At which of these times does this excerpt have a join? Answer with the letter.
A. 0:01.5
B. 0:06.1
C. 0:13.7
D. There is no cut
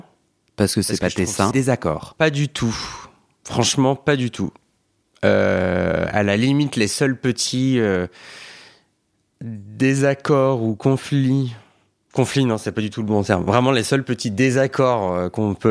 A